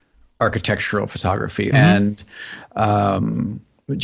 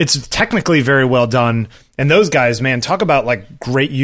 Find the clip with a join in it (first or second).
first